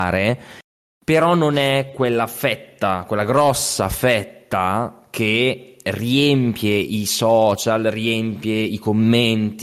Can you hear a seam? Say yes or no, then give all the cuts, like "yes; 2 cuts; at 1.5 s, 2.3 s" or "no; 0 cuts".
no; 0 cuts